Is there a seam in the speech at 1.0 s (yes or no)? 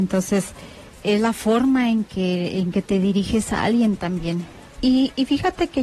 yes